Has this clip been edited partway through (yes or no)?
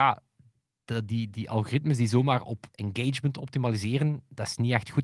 no